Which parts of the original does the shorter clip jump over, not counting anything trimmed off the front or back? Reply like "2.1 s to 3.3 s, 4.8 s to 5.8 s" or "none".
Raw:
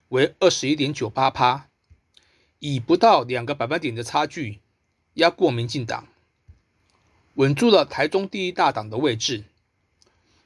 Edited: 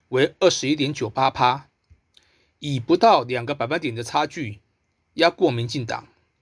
none